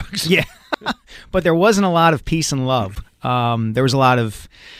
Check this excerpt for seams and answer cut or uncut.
uncut